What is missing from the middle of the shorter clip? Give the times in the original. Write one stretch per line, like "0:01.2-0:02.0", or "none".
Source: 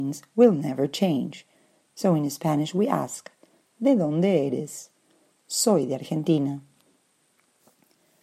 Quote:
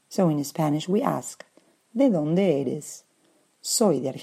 none